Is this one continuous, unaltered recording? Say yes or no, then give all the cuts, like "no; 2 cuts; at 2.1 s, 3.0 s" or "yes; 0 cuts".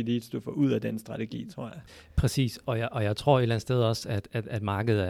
yes; 0 cuts